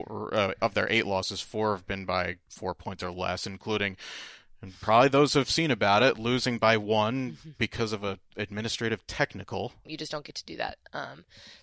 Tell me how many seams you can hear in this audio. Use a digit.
2